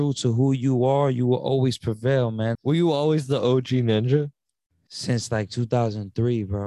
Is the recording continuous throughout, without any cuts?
no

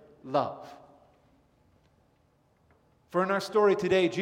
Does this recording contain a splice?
no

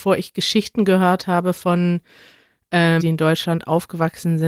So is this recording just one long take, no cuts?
no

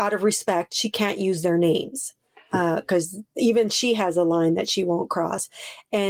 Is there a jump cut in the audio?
no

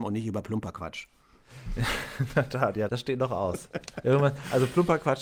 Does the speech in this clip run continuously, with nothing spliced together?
no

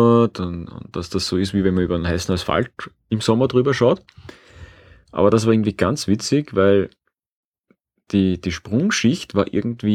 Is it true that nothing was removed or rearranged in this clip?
yes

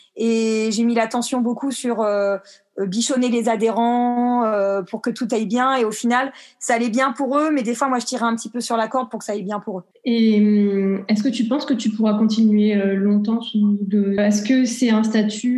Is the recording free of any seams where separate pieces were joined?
no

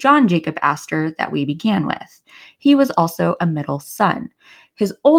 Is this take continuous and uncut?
yes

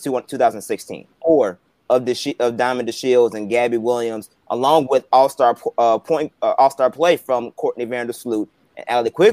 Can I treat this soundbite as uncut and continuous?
no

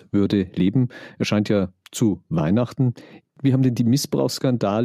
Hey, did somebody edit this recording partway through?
no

